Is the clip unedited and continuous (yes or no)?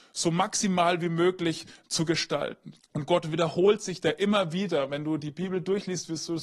no